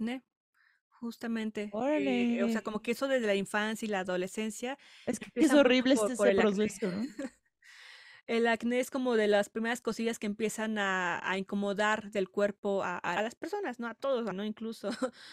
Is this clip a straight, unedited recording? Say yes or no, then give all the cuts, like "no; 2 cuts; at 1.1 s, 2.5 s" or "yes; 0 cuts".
no; 2 cuts; at 13.2 s, 14.3 s